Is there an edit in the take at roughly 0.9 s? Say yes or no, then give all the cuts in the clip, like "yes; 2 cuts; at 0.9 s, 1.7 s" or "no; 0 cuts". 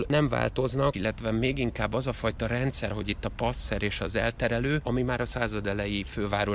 yes; 3 cuts; at 0.9 s, 2.9 s, 4.8 s